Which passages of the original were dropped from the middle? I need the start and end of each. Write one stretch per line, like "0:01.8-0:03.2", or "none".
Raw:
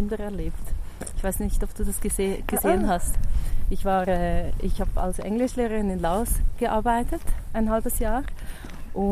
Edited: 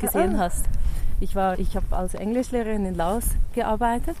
0:04.0-0:04.6